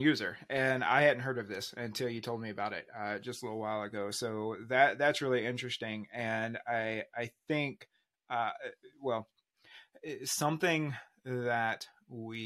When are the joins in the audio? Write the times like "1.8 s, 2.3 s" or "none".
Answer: none